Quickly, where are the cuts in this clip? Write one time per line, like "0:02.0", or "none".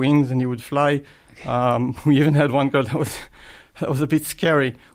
none